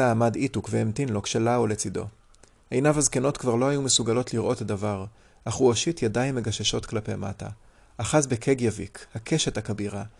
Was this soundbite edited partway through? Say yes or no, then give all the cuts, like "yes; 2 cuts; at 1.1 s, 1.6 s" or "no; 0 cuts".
no; 0 cuts